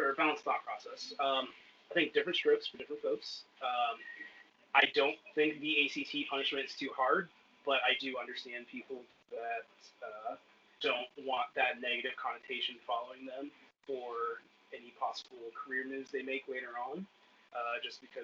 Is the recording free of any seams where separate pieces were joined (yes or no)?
yes